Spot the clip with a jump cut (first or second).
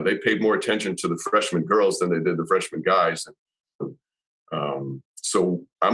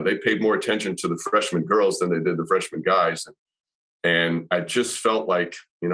first